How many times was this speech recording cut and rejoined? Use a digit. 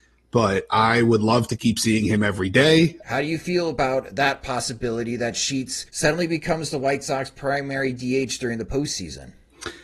2